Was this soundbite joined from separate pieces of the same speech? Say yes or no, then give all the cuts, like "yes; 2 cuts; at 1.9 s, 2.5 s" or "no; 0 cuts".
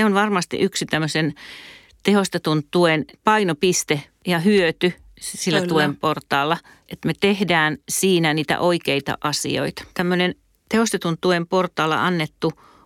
yes; 1 cut; at 9.9 s